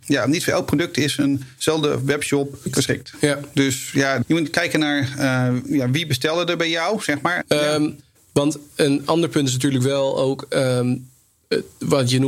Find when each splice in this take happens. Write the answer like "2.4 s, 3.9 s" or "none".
7.4 s